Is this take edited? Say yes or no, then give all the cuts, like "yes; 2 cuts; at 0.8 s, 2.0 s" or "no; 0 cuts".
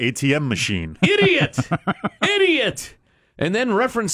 no; 0 cuts